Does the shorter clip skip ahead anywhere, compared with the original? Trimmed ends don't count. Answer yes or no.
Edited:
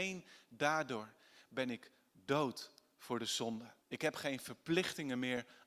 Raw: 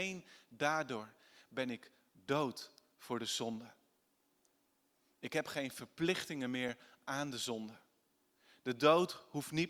yes